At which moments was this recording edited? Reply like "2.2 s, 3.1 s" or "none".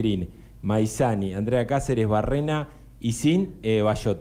none